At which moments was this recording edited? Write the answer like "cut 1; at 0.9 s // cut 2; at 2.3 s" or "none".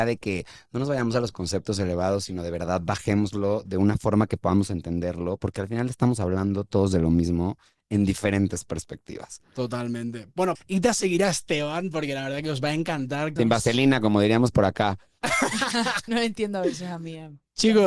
cut 1; at 10.6 s // cut 2; at 13.4 s // cut 3; at 16.1 s